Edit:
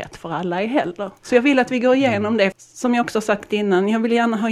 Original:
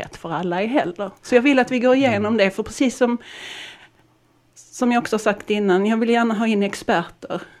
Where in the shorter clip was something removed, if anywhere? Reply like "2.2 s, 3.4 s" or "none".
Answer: 2.5 s